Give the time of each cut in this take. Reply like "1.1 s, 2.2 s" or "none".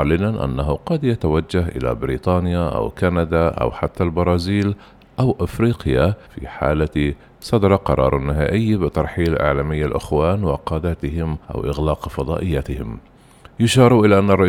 6.3 s, 11.4 s